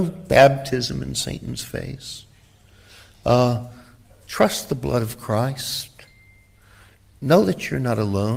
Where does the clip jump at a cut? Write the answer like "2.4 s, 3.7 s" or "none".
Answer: none